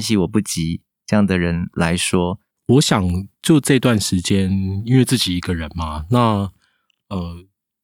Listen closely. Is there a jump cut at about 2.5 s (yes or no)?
yes